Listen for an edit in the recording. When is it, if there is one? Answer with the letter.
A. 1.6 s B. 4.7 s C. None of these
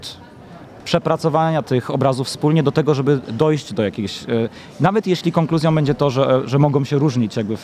A